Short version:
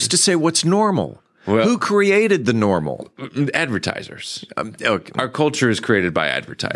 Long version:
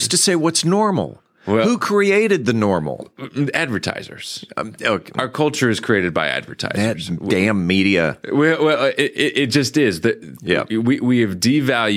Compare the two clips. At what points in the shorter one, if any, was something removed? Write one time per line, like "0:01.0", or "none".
none